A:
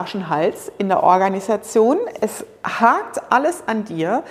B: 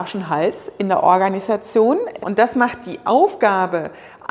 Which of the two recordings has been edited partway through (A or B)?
B